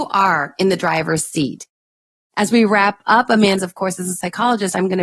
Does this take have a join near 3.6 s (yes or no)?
yes